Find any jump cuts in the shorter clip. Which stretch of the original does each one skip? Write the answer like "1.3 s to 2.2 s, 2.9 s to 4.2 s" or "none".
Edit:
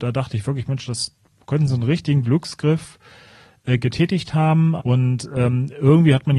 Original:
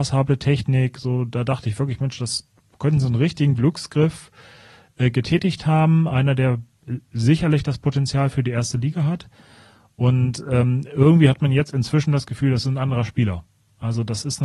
6.1 s to 9.9 s

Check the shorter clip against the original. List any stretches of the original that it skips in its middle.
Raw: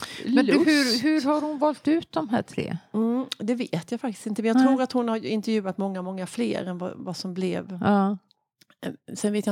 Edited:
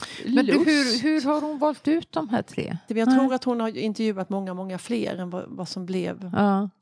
2.9 s to 4.4 s

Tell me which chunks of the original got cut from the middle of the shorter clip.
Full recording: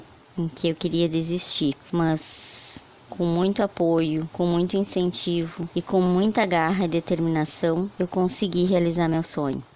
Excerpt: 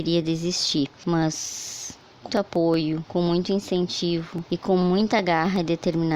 3.2 s to 3.6 s

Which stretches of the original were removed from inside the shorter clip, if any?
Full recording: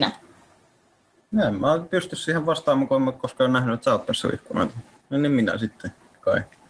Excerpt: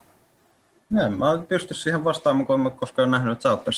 none

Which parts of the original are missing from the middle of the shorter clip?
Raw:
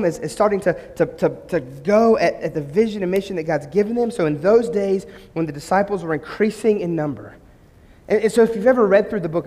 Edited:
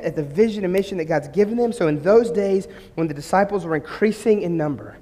none

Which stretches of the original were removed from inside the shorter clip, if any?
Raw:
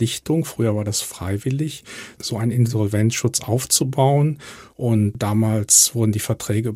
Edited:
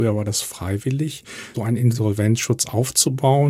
2.1 s to 2.3 s

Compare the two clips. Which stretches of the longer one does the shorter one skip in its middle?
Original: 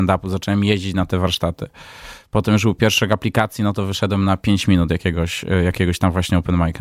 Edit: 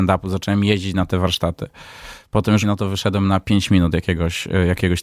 2.6 s to 3.6 s

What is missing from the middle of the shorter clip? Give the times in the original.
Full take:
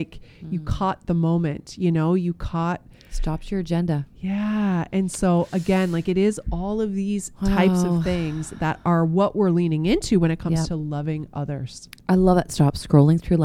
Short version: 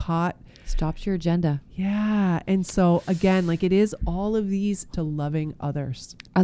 7.4 s to 10.7 s

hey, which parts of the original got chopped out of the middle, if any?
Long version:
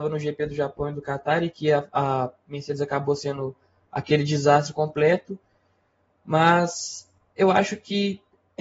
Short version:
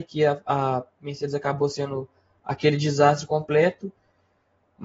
none

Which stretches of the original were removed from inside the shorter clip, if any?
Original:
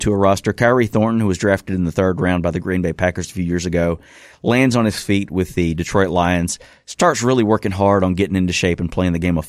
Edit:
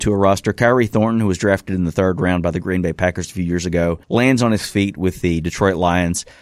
4.0 s to 4.4 s

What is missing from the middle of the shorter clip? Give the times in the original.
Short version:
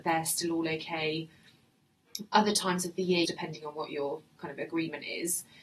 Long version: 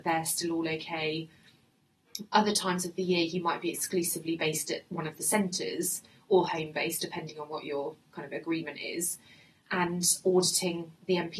3.3 s to 7.0 s

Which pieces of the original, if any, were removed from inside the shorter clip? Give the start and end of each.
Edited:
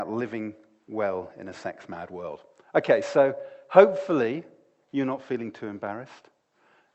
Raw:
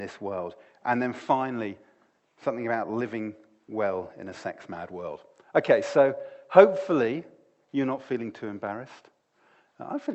none

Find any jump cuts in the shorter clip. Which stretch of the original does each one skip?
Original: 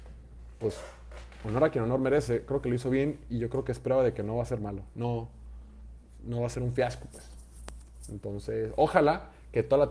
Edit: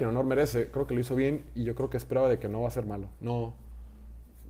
none

